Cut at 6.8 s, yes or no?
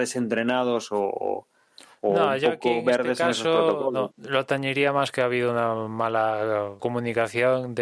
yes